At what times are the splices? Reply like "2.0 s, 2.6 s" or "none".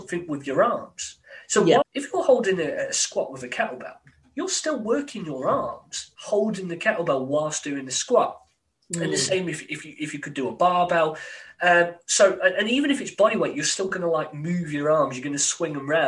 1.8 s